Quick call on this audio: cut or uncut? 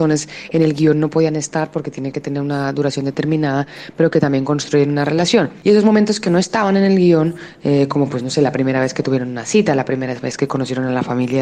uncut